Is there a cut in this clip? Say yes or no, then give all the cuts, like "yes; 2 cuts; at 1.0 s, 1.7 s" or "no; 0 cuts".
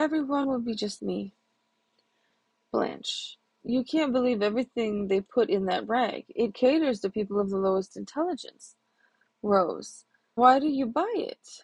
yes; 3 cuts; at 1.0 s, 3.6 s, 10.4 s